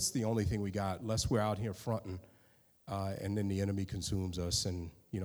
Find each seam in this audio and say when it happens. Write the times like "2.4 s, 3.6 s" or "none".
none